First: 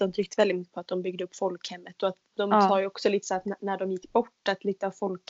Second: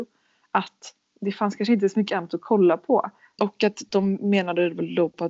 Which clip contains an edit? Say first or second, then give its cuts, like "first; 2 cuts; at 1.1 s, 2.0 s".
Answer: second; 1 cut; at 3.4 s